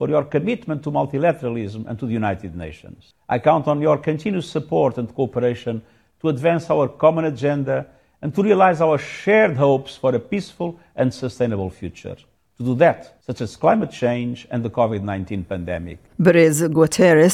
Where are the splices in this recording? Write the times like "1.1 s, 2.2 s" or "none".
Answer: 13.2 s, 16.1 s